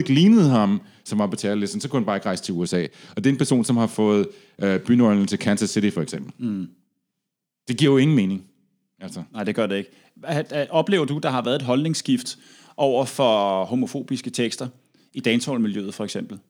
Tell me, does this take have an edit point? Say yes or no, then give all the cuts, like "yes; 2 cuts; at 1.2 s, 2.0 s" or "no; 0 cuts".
no; 0 cuts